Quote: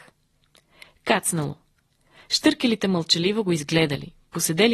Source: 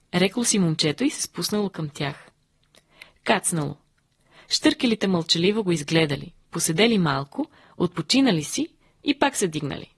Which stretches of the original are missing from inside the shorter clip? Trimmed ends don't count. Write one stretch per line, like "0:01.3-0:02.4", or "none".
none